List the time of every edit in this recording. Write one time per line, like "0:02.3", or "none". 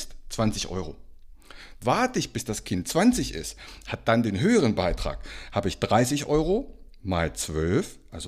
0:01.7